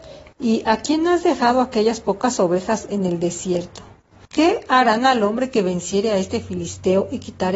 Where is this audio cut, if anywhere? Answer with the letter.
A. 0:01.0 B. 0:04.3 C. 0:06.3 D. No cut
B